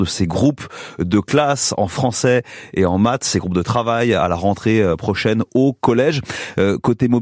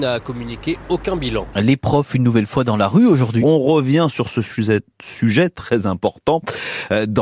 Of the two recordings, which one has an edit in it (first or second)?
second